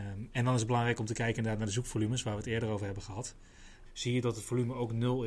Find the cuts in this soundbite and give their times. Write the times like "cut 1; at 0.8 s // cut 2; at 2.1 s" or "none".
cut 1; at 3.9 s